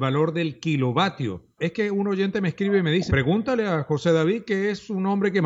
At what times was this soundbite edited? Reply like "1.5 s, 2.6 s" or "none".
1.6 s, 3.1 s